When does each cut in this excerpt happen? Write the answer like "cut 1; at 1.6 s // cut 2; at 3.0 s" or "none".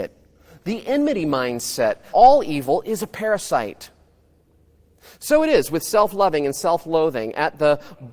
cut 1; at 2.1 s